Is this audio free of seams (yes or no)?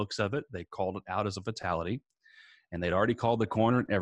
yes